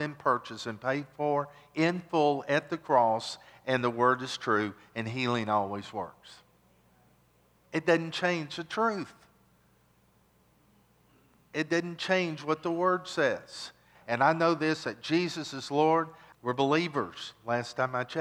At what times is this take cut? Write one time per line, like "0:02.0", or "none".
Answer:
0:14.0
0:16.3